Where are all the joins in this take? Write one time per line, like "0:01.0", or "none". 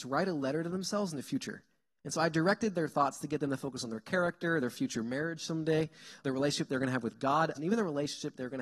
0:06.2
0:07.5